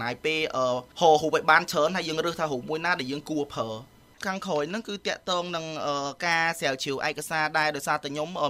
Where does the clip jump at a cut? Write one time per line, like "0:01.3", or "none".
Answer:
none